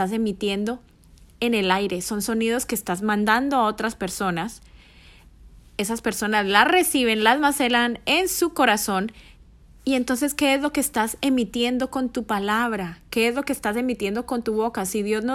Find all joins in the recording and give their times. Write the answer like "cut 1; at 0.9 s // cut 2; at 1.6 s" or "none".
none